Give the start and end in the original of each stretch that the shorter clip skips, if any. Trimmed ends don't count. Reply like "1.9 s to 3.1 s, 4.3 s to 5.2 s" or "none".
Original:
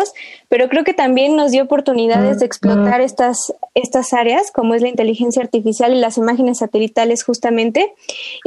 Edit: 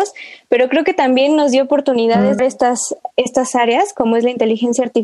2.4 s to 3.0 s

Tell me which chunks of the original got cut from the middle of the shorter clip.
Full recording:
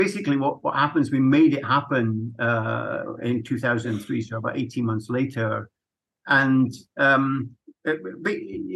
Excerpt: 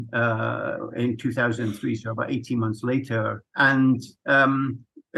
5.7 s to 6.2 s

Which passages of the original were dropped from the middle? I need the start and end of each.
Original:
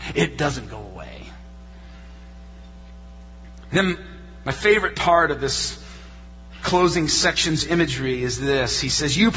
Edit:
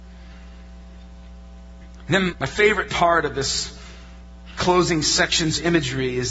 4.0 s to 4.4 s

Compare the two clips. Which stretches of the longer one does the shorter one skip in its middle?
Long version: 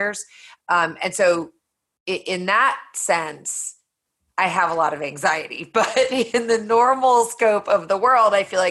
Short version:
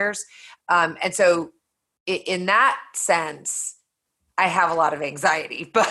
none

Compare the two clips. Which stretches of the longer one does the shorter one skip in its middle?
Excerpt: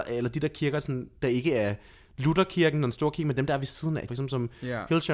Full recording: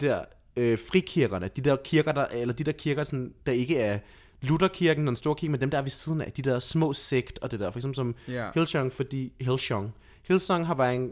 6.3 s to 7.7 s

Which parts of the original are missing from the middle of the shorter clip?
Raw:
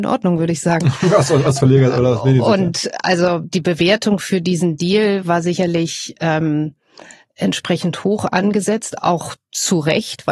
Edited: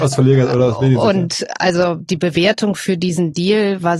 none

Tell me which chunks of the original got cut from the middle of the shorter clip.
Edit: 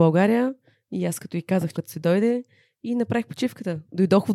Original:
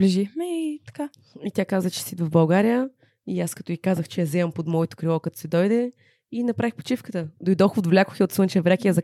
4.1 s to 5.2 s

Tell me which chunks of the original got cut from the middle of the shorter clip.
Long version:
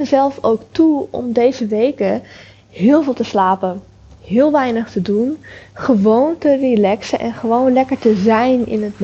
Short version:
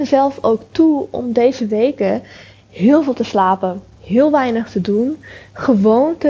3.9 s to 4.1 s

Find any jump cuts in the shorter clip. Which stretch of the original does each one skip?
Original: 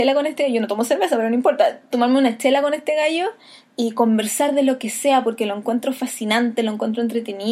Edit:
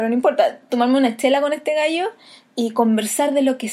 none

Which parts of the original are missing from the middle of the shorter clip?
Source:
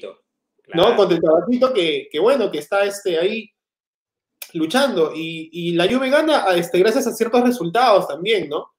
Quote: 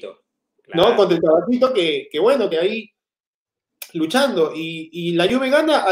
2.5 s to 3.1 s

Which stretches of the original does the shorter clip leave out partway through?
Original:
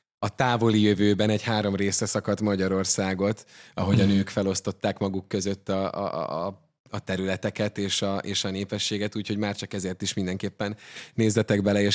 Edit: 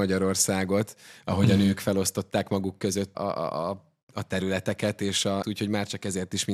5.6 s to 5.9 s, 8.2 s to 9.1 s

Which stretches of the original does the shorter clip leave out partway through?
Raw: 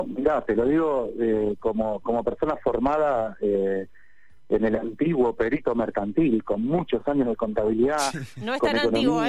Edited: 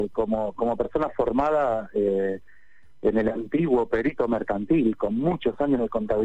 none

